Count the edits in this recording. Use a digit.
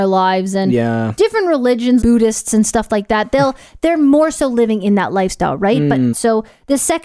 2